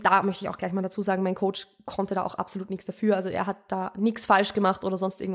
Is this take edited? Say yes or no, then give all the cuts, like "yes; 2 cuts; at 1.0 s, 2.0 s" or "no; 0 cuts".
no; 0 cuts